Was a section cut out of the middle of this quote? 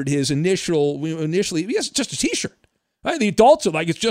no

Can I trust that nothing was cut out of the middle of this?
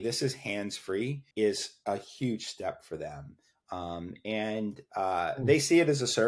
no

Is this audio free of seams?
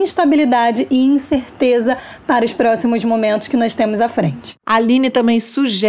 no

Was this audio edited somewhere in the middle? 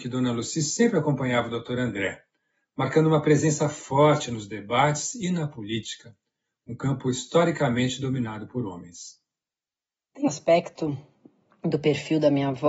yes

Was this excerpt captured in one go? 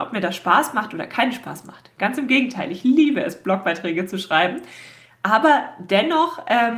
yes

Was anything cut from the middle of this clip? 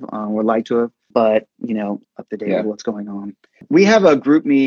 yes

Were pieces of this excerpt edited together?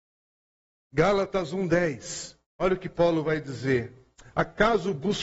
no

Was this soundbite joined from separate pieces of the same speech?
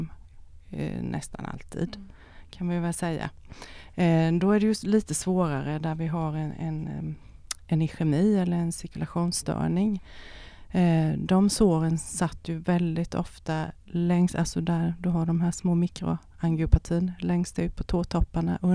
no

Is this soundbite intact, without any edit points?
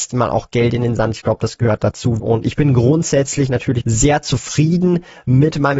no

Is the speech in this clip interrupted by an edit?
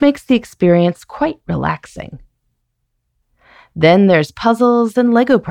no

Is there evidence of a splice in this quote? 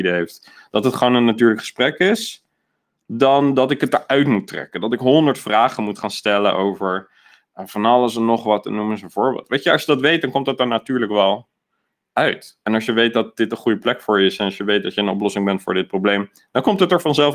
no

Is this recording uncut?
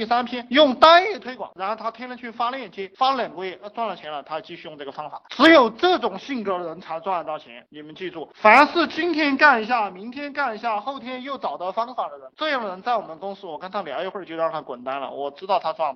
yes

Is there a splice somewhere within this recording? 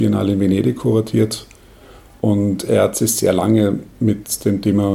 no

